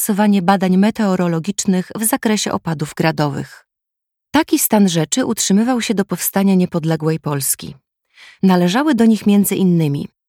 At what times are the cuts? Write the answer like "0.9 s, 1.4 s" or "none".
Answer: 8.4 s